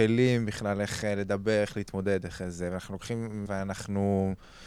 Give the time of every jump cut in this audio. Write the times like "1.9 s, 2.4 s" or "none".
3.5 s